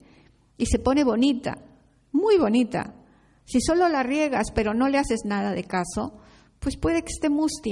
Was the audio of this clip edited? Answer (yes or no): no